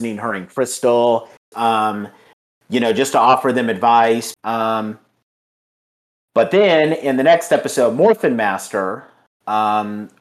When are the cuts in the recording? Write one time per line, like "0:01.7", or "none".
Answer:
0:01.5
0:04.3